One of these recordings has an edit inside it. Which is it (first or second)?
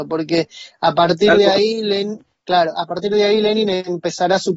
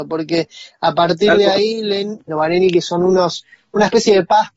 second